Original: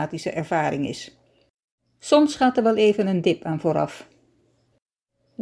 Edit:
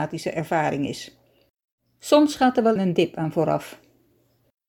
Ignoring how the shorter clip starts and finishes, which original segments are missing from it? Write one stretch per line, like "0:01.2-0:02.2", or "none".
0:02.8-0:03.0